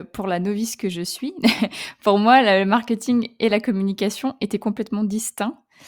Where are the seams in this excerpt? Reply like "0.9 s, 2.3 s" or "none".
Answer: none